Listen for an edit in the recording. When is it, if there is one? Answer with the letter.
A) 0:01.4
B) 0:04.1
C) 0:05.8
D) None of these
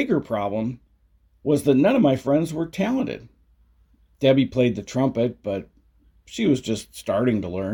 B